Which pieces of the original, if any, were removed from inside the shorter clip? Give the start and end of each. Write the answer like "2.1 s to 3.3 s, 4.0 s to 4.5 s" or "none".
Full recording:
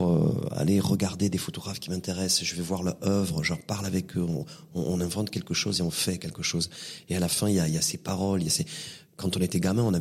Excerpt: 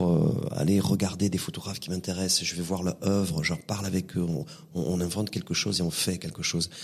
none